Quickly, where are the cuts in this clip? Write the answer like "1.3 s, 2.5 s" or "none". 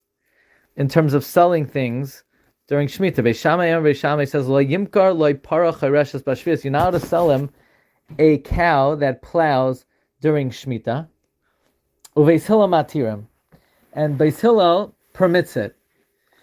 15.0 s